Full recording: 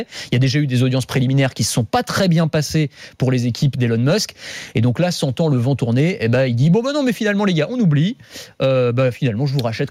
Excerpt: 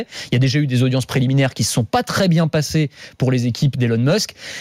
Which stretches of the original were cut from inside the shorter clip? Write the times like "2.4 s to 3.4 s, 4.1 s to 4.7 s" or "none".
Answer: none